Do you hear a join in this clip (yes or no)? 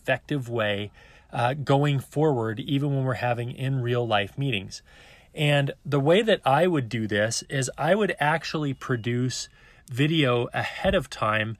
no